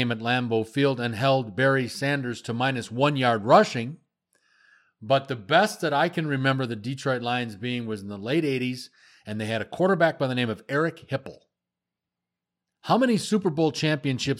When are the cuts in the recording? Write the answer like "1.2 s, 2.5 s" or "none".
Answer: none